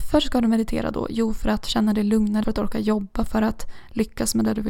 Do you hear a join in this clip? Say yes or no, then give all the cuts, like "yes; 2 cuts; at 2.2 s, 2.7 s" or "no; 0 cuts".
yes; 1 cut; at 2.4 s